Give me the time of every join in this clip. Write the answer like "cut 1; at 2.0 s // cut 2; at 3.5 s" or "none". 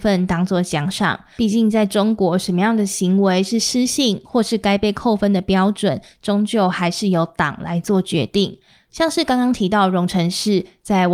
cut 1; at 1.4 s